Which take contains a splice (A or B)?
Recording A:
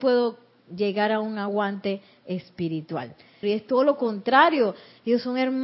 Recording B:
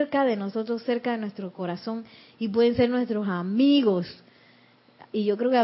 A